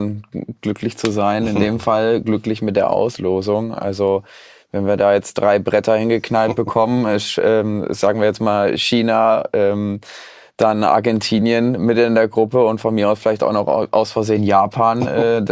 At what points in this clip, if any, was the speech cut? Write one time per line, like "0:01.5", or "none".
none